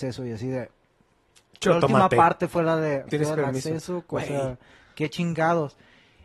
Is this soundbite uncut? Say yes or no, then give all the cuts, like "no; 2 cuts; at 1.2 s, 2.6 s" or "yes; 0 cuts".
no; 1 cut; at 3.1 s